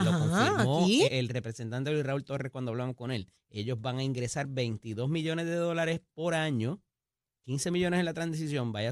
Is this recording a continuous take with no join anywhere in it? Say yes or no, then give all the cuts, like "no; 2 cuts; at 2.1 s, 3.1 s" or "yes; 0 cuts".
no; 2 cuts; at 1.1 s, 3.4 s